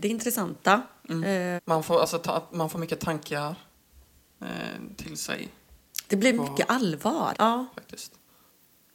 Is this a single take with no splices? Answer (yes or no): no